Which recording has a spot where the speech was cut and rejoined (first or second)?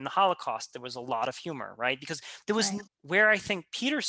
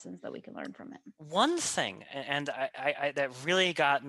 first